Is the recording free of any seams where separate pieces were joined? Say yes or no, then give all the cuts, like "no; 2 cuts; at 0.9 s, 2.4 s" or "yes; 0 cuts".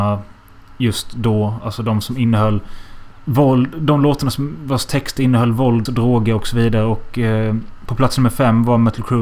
no; 1 cut; at 5.9 s